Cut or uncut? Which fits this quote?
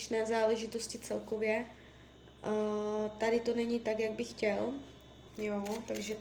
cut